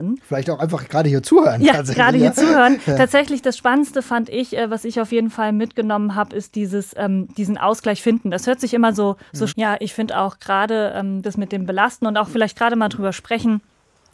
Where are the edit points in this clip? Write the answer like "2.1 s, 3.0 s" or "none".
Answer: 9.5 s, 11.2 s